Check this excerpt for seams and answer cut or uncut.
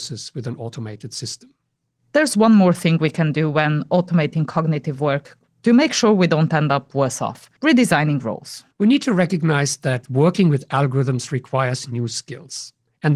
cut